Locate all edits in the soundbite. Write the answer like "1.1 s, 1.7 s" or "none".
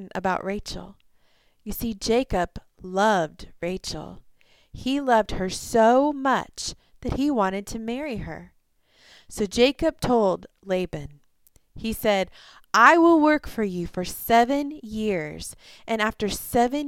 none